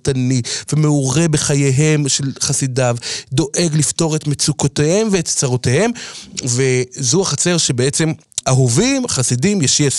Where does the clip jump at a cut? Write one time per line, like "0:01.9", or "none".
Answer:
0:08.4